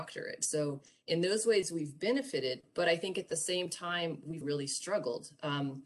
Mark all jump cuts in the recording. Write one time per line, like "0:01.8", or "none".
0:04.4

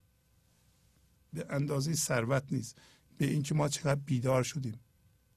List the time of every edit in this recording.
0:01.3

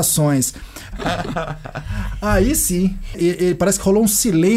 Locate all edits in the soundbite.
0:00.9
0:03.1

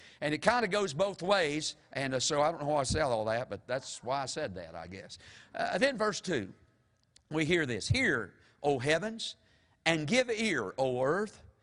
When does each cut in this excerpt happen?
none

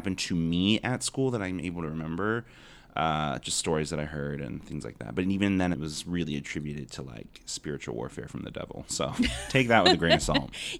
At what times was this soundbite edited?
0:05.7

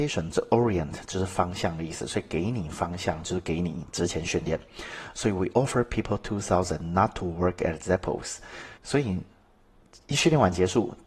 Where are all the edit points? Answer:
0:08.8

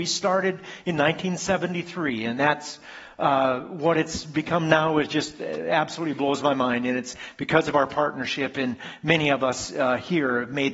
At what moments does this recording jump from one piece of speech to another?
none

